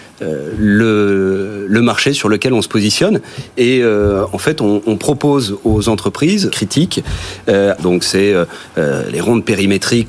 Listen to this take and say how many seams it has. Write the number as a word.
two